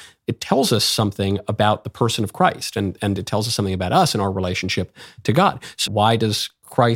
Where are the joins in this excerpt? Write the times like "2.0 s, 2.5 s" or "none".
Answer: 5.9 s